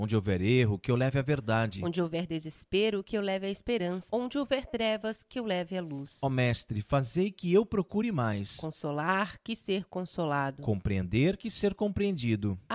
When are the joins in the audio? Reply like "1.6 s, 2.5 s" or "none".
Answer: 4.1 s